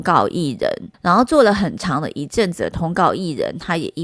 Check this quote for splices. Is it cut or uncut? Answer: cut